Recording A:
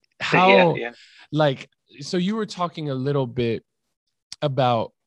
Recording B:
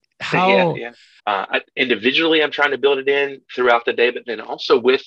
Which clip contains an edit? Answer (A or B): B